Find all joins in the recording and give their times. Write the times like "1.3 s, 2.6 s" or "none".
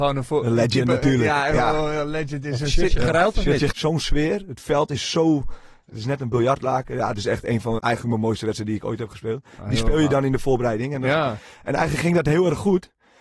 3.7 s, 7.8 s